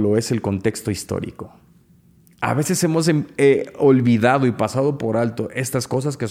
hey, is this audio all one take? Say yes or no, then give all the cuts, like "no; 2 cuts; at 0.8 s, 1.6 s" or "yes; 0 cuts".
yes; 0 cuts